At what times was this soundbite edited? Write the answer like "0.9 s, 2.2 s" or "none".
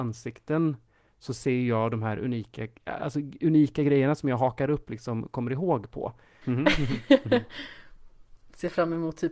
2.8 s, 6.4 s